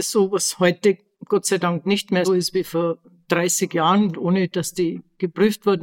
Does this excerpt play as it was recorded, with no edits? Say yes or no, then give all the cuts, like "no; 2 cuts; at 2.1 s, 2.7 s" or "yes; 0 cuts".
no; 2 cuts; at 2.2 s, 4.1 s